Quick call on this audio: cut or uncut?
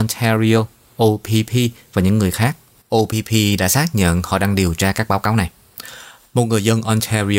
uncut